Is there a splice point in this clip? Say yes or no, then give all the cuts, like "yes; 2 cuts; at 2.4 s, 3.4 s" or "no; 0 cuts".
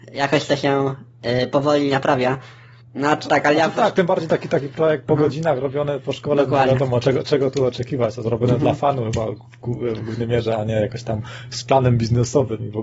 no; 0 cuts